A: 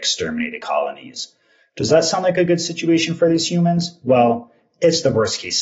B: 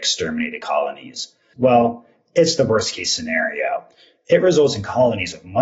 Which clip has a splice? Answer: B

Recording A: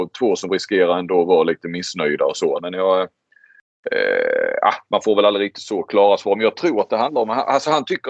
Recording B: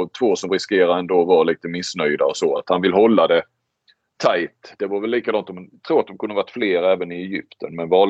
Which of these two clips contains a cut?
A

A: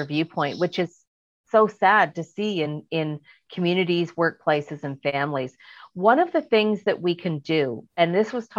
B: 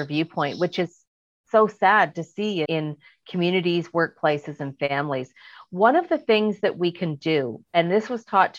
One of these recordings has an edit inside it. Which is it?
B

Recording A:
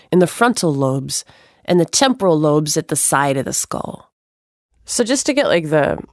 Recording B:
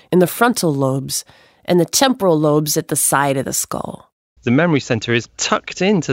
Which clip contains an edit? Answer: B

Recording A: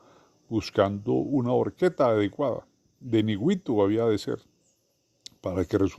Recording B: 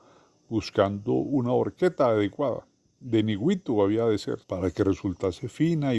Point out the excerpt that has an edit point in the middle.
B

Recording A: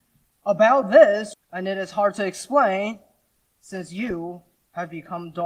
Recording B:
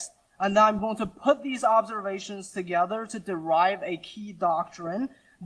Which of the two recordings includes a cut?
A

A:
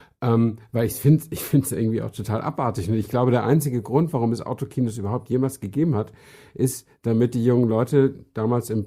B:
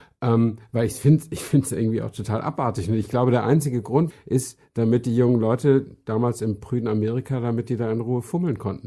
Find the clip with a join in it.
B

